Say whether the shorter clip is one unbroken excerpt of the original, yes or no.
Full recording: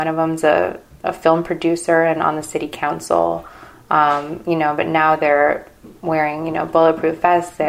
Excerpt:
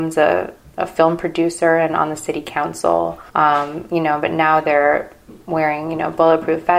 no